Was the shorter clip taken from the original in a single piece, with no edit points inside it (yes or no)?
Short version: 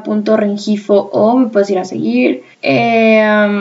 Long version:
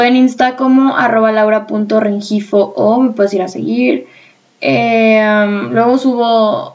no